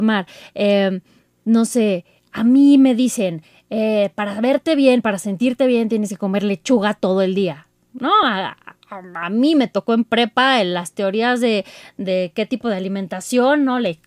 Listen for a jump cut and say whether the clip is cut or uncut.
uncut